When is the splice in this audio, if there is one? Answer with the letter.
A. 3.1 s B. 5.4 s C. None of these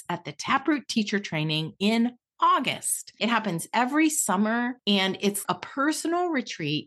B